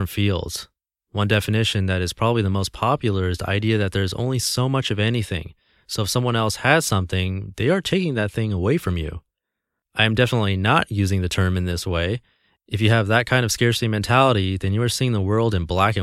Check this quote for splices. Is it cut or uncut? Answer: uncut